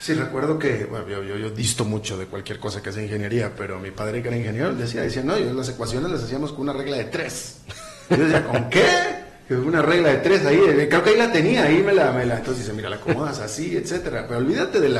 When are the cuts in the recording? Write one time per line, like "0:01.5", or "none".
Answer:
none